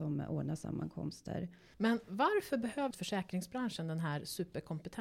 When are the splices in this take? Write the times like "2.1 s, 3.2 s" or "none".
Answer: 1.7 s, 2.9 s